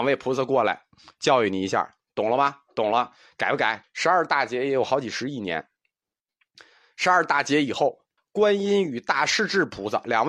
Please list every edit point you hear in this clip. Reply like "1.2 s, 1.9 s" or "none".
3.8 s, 8.2 s